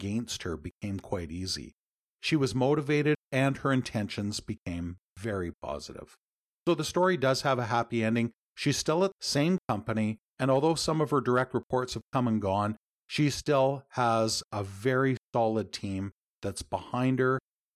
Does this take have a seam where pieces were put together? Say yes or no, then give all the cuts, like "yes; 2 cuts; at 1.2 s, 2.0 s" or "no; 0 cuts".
no; 0 cuts